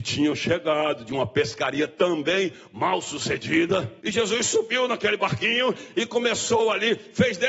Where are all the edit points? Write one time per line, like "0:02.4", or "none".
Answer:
0:04.0